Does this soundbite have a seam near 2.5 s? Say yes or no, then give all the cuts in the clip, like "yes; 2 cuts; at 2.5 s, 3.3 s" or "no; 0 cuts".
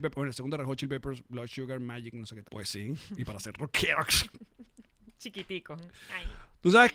yes; 1 cut; at 2.5 s